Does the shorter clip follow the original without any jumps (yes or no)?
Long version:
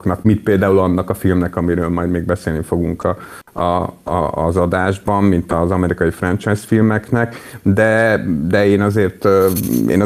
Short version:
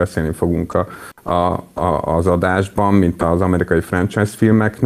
yes